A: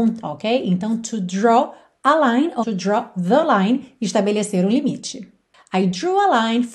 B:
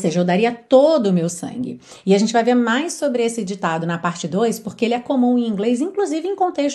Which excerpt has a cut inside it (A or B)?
A